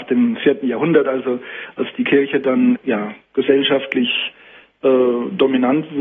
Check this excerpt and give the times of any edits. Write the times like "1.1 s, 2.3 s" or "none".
2.8 s

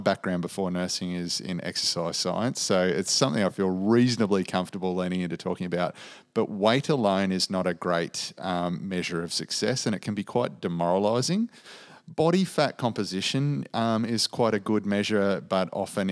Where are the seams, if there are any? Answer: none

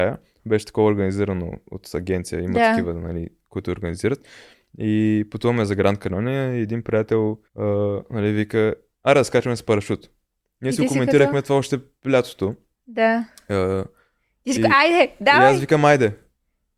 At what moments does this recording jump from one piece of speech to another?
7.5 s

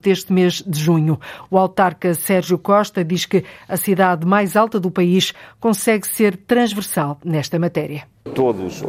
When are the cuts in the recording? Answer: none

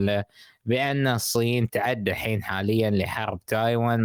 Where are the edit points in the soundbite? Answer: 1.7 s

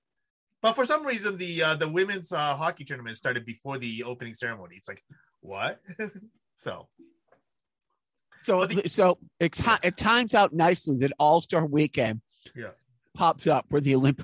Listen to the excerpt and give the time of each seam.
none

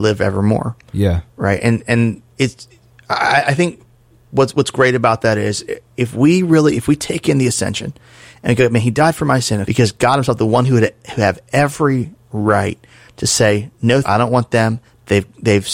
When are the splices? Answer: 9.6 s, 14.0 s

